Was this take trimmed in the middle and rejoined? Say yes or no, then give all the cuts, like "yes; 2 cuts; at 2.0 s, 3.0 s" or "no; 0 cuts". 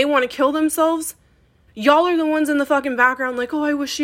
yes; 1 cut; at 1.7 s